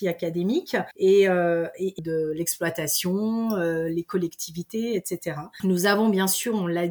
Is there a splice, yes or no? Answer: yes